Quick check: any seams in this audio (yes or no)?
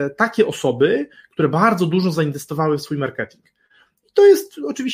no